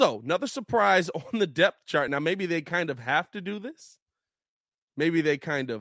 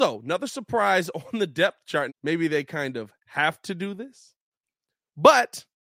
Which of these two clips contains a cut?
second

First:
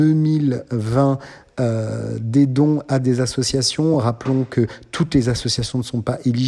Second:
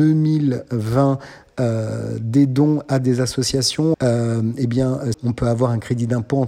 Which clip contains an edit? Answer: second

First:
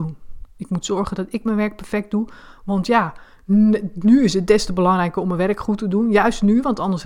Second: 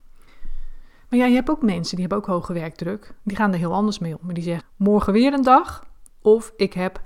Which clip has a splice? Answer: second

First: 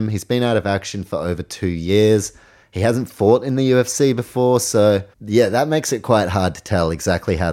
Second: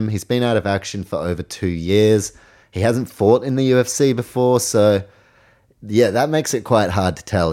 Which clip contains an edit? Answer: first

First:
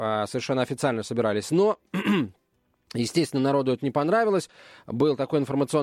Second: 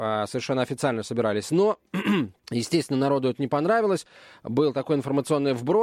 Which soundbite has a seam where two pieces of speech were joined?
second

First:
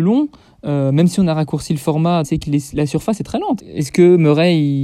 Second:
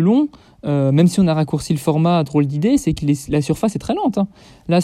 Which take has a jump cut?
first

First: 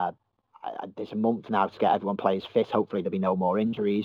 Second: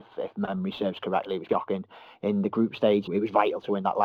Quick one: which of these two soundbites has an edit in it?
second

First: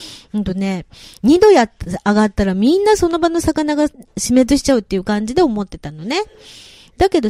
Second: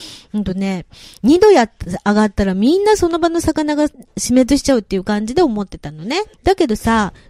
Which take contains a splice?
second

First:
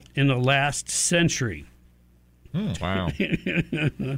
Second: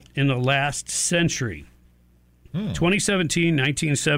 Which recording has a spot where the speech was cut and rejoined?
first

